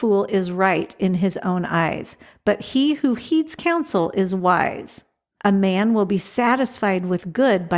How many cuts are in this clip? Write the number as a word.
one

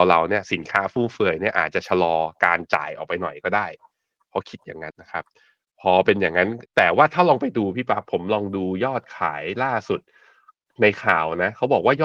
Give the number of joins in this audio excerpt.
two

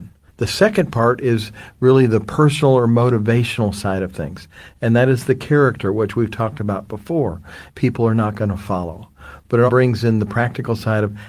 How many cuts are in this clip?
two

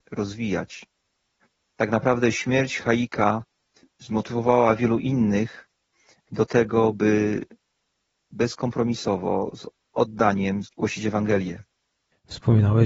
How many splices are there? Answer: one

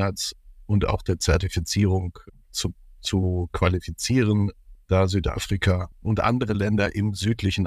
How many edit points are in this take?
two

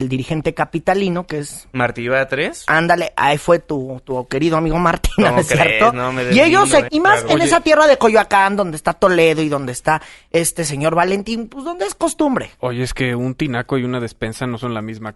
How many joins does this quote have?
one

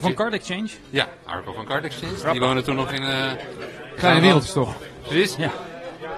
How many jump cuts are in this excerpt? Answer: zero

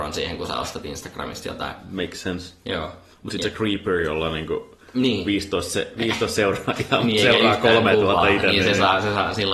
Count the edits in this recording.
zero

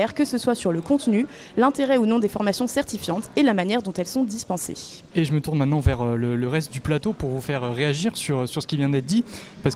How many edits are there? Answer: one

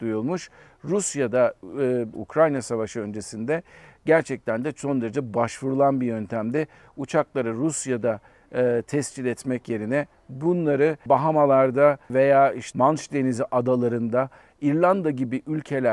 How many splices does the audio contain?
one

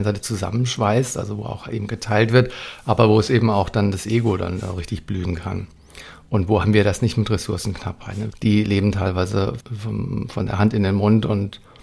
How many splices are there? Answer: two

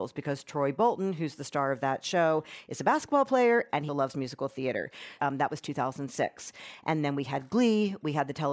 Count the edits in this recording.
two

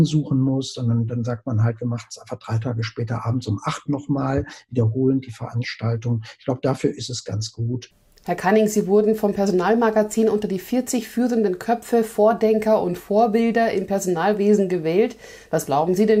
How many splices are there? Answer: zero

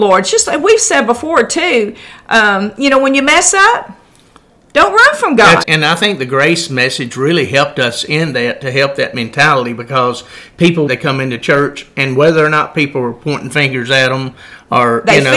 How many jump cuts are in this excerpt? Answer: two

